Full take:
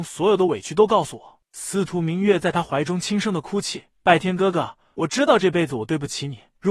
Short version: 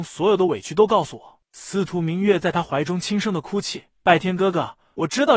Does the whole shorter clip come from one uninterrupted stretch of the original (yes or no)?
yes